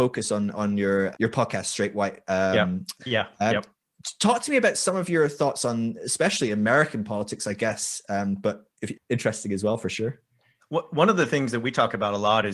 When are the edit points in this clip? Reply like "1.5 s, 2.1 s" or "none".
1.1 s, 3.0 s, 8.9 s